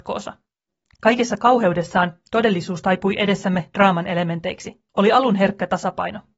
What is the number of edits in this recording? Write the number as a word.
one